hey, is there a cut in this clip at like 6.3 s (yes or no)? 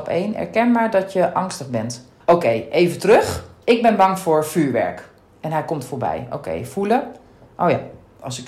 no